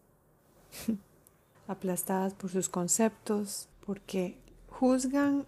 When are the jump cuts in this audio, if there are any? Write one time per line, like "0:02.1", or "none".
0:01.5
0:03.7

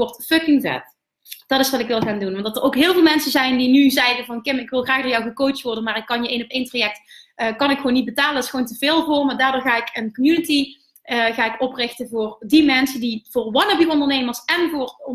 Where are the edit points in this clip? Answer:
none

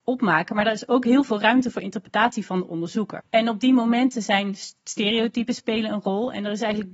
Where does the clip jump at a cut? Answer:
0:03.2

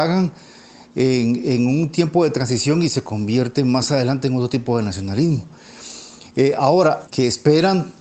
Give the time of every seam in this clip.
0:07.1

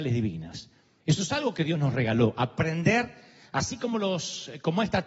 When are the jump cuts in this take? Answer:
0:01.0

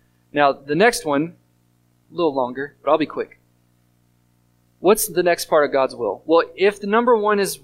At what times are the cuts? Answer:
0:02.0

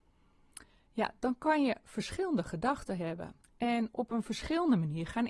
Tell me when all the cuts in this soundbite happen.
0:03.4

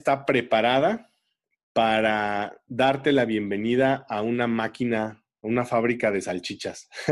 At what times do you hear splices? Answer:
none

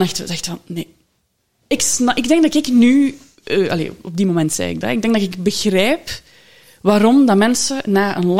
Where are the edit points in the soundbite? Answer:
none

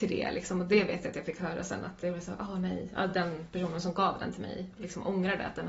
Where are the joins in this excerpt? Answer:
none

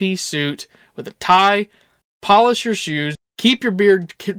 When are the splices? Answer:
0:03.2

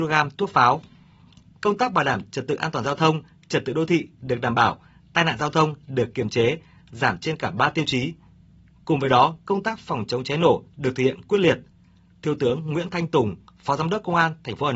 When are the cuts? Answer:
none

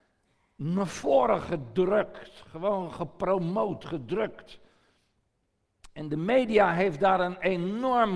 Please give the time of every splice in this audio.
none

